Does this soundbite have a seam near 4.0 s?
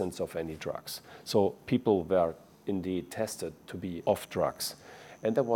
yes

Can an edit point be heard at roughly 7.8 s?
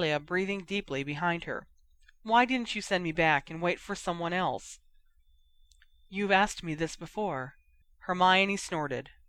yes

